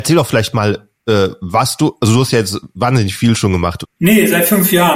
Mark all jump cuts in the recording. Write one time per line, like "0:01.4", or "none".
0:03.8